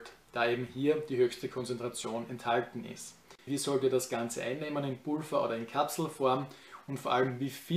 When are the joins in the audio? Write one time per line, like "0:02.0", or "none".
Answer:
0:03.5